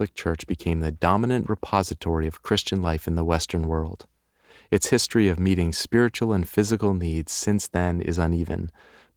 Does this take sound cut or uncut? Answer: uncut